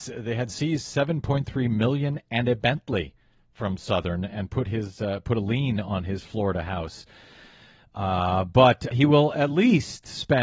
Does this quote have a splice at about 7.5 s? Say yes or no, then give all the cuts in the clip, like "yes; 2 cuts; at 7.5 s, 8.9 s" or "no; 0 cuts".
no; 1 cut; at 8.9 s